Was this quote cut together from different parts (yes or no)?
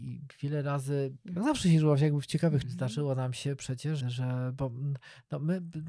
yes